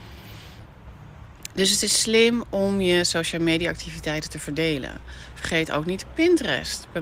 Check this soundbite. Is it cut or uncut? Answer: uncut